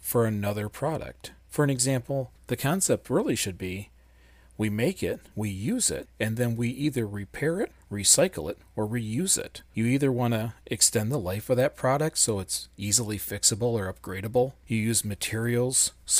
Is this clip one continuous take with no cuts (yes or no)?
yes